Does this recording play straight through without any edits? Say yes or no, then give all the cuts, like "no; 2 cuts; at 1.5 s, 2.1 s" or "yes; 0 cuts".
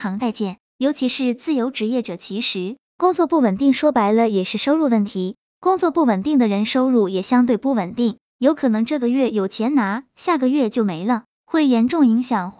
yes; 0 cuts